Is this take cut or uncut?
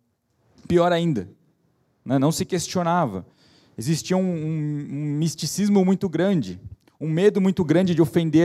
uncut